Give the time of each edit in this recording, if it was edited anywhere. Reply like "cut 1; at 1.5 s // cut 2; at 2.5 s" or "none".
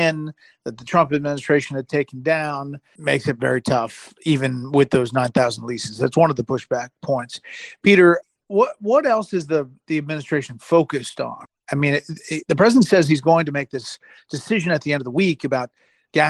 none